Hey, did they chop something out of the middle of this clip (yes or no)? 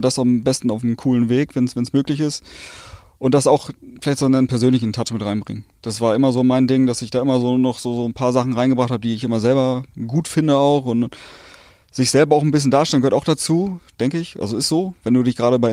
no